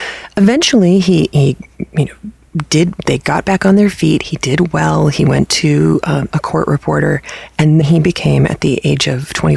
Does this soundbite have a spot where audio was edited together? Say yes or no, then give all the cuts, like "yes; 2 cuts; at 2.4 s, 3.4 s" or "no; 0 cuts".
yes; 2 cuts; at 6.3 s, 7.8 s